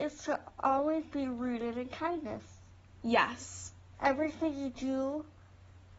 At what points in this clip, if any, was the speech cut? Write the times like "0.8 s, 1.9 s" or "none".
none